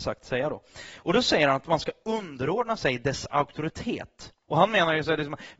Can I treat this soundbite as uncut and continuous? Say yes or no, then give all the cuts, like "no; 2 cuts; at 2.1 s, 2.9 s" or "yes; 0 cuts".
yes; 0 cuts